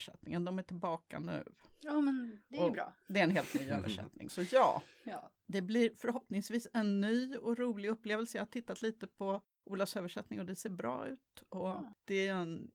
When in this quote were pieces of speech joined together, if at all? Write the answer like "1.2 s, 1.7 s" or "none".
none